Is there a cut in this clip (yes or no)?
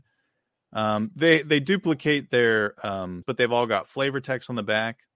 yes